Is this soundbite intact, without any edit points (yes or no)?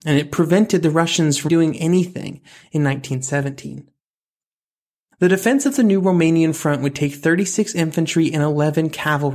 no